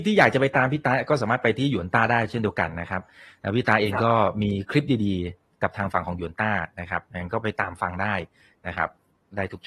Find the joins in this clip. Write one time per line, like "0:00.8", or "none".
none